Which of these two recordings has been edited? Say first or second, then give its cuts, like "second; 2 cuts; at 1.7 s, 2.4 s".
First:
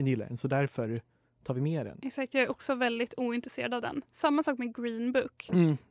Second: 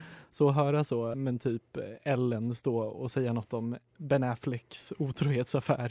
second; 1 cut; at 1.1 s